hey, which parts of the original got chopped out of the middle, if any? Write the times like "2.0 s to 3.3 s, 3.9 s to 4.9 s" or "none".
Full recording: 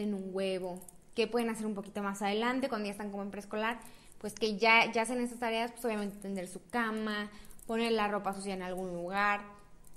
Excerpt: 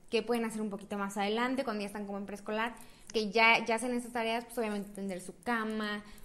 4.1 s to 4.3 s